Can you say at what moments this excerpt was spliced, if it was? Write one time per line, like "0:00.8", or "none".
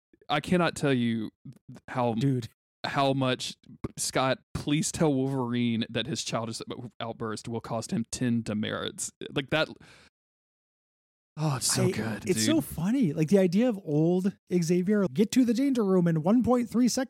0:12.2
0:15.1